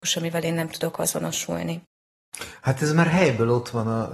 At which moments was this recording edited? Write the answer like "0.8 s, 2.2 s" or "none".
none